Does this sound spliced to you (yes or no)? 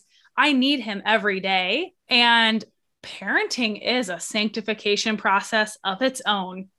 yes